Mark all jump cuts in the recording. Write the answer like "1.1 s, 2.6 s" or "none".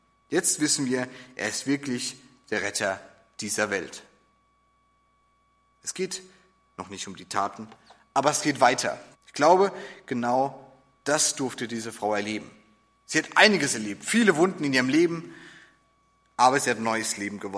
9.1 s

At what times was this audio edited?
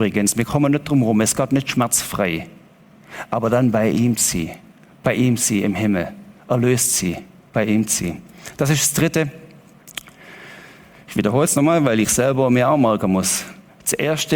none

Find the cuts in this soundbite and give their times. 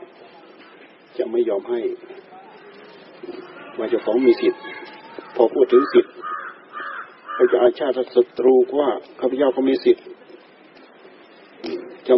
9.2 s

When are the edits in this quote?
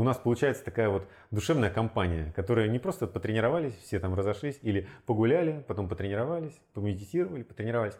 none

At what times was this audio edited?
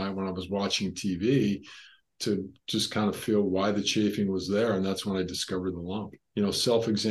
none

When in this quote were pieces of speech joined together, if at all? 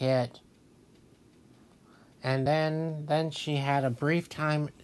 none

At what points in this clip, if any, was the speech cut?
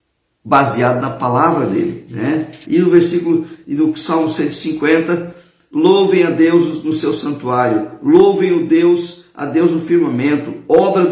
2.6 s

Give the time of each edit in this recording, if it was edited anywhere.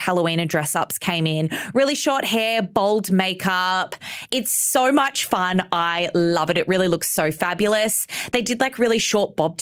none

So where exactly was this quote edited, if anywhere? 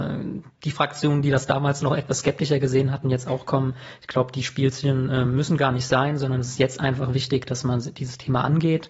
none

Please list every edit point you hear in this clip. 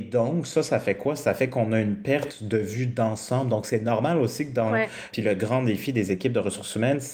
5.1 s

